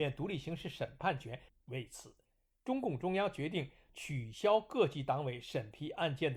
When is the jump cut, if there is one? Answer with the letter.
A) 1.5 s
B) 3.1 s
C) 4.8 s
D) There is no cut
A